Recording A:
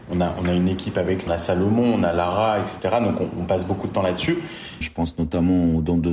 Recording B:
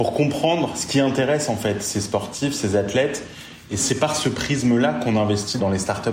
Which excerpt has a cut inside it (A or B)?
A